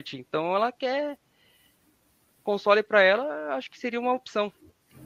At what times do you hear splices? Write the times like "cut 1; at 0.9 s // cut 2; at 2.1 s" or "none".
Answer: cut 1; at 2.4 s